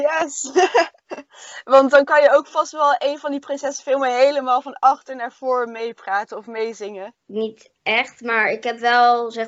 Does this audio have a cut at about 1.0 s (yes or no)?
no